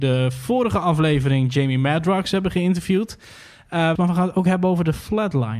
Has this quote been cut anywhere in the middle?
yes; 1 cut; at 4.0 s

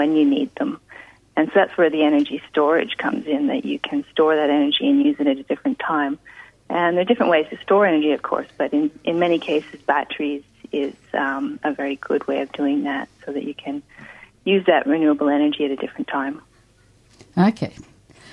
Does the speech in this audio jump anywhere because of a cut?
no; 0 cuts

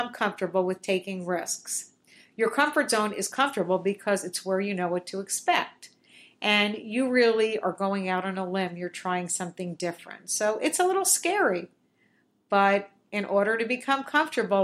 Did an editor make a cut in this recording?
no; 0 cuts

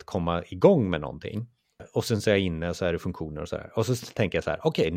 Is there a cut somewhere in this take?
yes; 1 cut; at 1.8 s

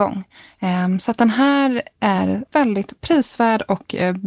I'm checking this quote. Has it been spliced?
yes; 1 cut; at 2.5 s

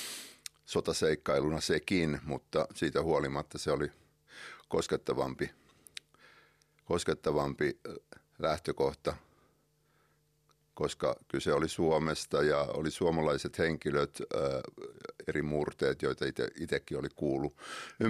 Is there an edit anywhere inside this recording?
no; 0 cuts

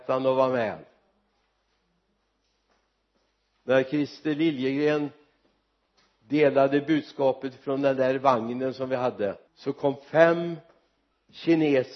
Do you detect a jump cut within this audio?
yes; 1 cut; at 9.5 s

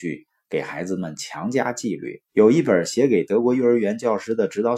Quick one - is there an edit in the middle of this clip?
yes; 1 cut; at 2.3 s

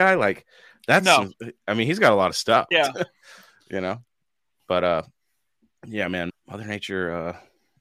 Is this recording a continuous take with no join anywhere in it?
no; 2 cuts; at 2.7 s, 6.3 s

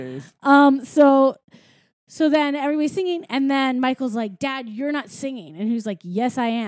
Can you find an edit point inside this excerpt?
no; 0 cuts

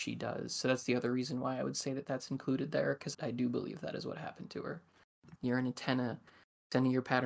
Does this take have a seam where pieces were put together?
yes; 2 cuts; at 3.1 s, 5.4 s

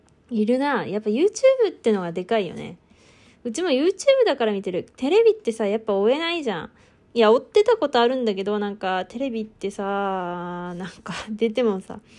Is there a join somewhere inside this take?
no; 0 cuts

